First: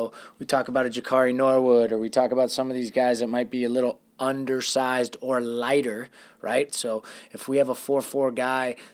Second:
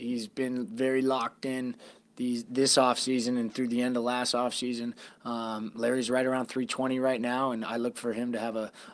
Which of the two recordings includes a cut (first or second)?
first